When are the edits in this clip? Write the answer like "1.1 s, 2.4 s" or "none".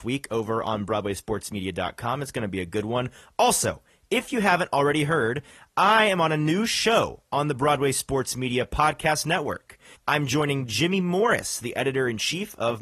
9.9 s